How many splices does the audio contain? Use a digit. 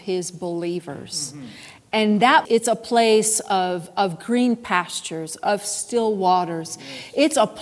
1